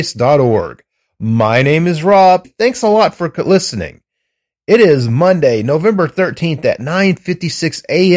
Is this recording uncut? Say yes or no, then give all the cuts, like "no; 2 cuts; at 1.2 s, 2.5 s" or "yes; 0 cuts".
no; 1 cut; at 2.4 s